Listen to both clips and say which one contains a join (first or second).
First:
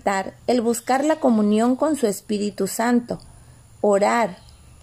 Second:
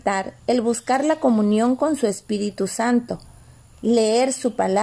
second